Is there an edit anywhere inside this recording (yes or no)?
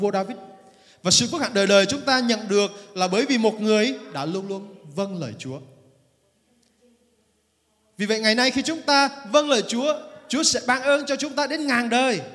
no